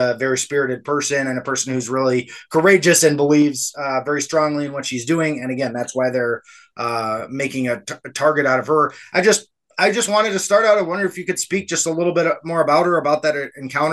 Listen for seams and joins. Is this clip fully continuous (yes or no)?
yes